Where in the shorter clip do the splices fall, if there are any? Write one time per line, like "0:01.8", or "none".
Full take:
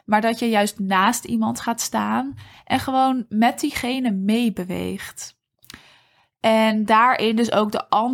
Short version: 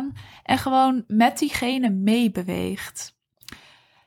none